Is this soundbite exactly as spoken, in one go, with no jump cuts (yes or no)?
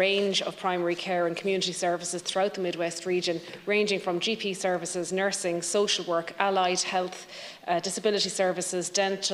yes